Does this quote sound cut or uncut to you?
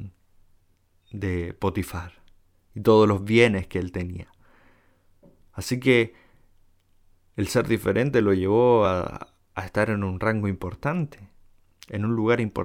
uncut